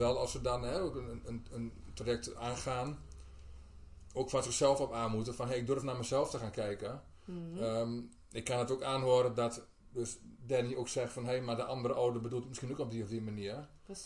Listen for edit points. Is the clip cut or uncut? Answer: cut